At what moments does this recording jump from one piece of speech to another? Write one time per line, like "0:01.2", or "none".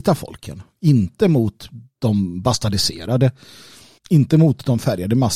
0:04.0